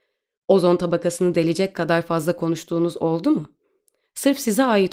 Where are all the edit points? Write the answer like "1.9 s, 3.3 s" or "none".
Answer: none